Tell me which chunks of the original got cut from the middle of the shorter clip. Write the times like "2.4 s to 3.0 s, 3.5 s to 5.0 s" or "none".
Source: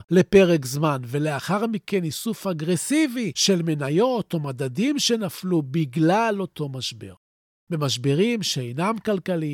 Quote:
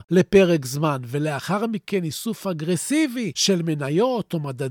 none

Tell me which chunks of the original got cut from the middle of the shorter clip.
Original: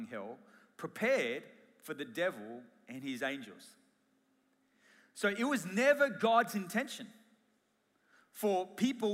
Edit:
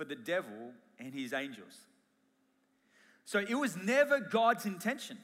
none

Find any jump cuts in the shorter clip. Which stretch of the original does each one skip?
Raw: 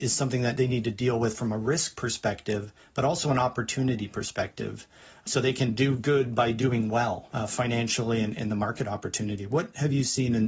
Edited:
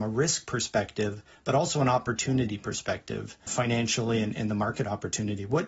5.0 s to 7.5 s

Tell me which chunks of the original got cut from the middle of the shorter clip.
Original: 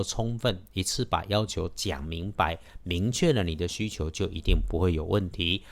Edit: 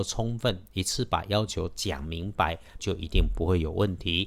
2.8 s to 4.1 s

